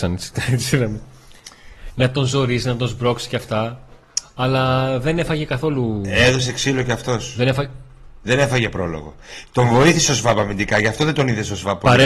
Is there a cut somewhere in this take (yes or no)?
no